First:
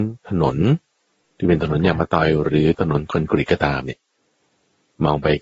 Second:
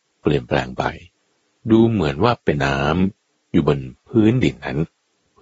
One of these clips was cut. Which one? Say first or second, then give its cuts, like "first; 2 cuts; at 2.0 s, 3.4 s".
second; 1 cut; at 2.6 s